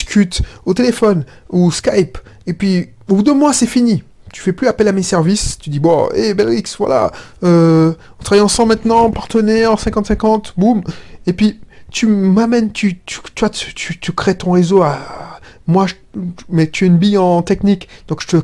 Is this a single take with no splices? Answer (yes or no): yes